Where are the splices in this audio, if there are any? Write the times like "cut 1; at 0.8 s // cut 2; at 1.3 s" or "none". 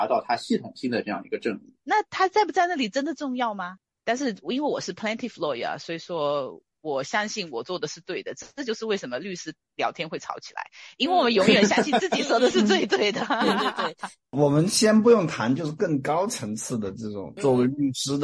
cut 1; at 1.8 s